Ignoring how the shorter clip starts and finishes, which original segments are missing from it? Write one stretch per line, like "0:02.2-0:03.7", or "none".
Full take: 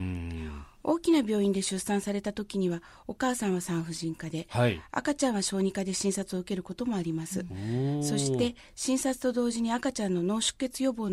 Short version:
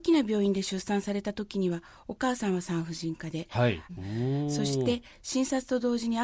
0:04.9-0:07.4